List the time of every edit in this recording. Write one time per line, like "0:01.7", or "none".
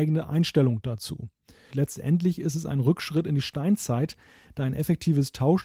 0:01.7